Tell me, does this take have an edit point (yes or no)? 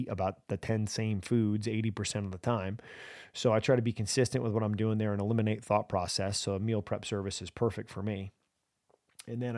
no